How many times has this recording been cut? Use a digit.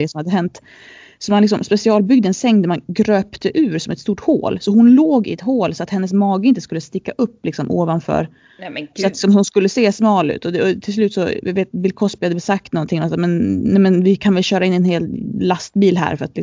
0